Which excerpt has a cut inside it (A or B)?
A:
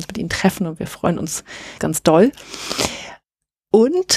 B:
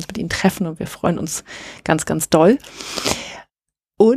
A